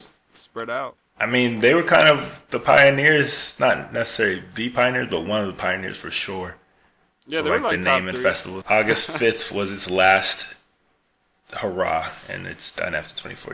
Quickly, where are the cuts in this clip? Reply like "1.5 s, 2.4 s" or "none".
8.6 s